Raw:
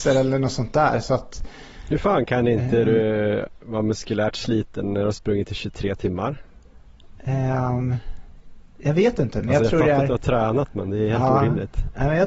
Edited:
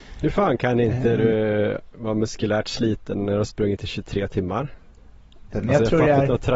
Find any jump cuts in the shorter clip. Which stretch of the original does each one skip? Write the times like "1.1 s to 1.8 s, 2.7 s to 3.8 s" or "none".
7.2 s to 9.3 s